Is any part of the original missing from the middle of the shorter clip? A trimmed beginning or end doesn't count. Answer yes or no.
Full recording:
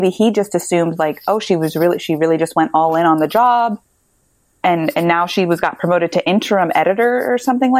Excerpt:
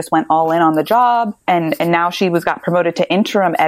yes